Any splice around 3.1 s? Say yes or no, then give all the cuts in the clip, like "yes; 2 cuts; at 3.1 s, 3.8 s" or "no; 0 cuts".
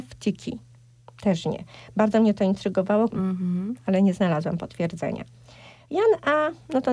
yes; 1 cut; at 3.1 s